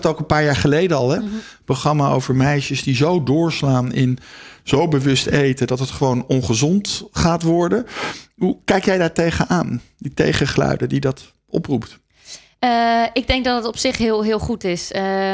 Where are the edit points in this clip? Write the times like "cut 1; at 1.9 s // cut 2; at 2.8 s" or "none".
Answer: cut 1; at 1.2 s